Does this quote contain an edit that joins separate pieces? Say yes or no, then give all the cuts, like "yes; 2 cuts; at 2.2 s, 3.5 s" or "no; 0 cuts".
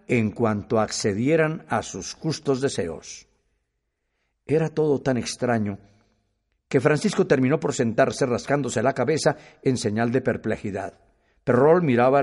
no; 0 cuts